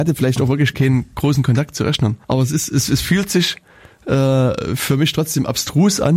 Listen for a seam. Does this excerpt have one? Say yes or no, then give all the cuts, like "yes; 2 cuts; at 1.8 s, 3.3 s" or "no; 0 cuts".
yes; 1 cut; at 2.2 s